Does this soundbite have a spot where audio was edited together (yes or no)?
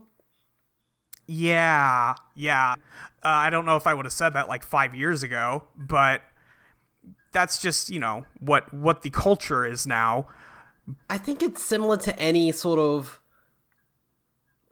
yes